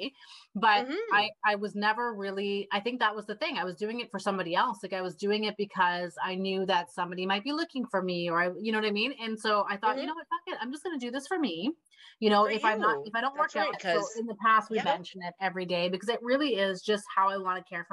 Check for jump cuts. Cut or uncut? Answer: cut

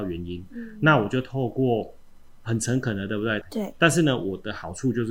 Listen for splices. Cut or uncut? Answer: cut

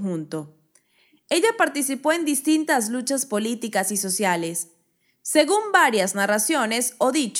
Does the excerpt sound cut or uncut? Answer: cut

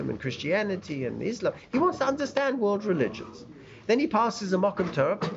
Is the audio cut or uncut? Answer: uncut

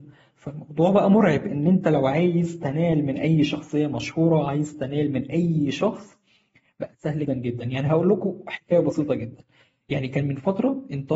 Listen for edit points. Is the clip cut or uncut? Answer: cut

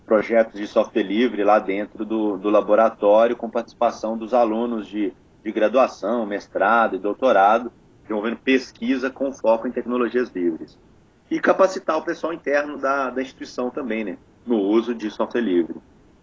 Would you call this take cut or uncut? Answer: uncut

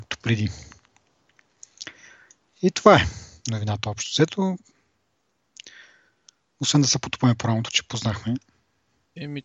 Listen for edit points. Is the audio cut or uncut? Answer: uncut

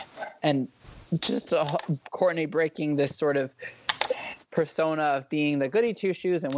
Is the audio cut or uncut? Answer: uncut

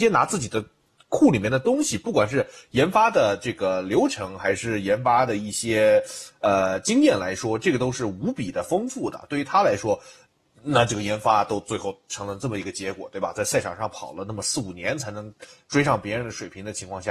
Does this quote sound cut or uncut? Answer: uncut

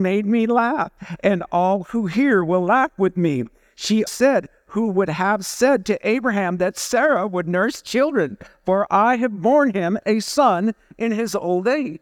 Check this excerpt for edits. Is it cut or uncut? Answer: cut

